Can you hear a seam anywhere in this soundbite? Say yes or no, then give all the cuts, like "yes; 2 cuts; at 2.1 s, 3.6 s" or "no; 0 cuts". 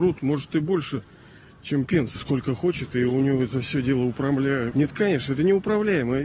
yes; 2 cuts; at 2.2 s, 4.7 s